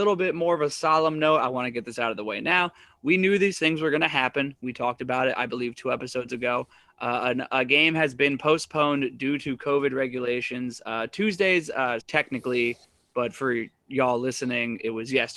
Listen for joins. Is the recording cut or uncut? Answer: cut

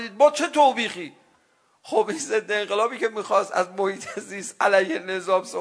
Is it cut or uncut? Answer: uncut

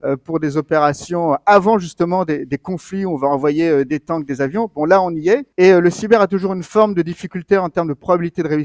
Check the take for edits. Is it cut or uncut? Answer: cut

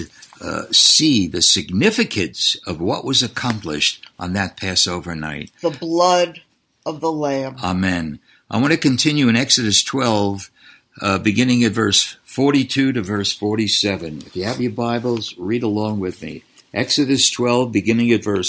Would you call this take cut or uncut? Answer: uncut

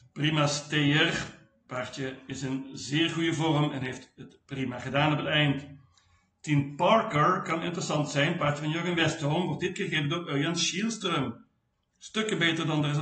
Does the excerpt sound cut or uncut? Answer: uncut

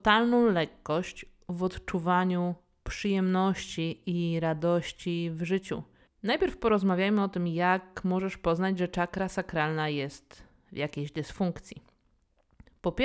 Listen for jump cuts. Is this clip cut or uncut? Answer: cut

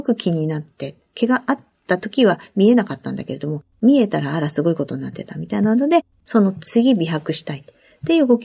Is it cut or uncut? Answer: uncut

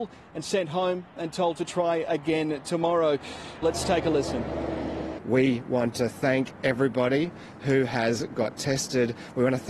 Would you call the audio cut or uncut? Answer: cut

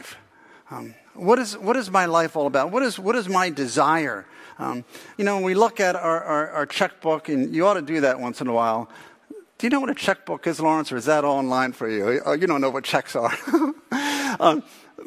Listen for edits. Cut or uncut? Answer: cut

